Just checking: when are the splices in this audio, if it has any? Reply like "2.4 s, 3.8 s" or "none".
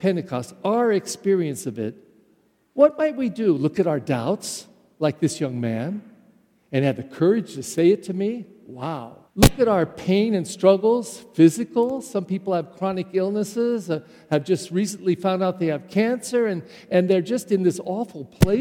9.3 s